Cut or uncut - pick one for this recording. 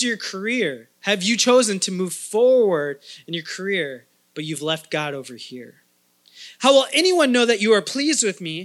cut